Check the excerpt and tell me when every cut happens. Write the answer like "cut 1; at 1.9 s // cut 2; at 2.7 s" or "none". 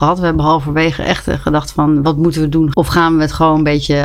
cut 1; at 2.7 s